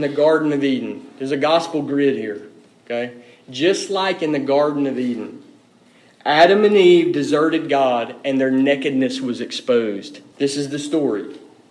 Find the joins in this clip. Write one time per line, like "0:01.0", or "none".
0:10.3